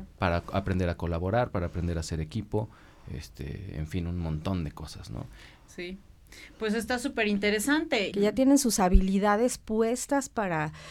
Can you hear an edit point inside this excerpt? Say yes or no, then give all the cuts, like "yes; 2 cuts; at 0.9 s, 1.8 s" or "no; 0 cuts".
yes; 1 cut; at 8.1 s